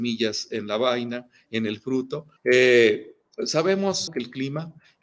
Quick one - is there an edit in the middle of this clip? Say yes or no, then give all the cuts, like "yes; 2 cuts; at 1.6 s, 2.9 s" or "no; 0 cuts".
yes; 2 cuts; at 2.4 s, 4.1 s